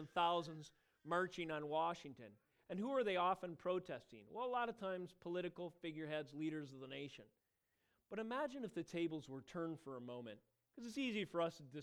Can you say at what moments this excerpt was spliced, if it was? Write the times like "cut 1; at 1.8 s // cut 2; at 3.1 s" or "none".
none